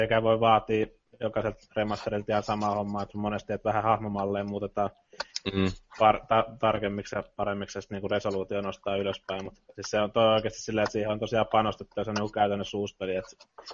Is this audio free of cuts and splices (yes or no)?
yes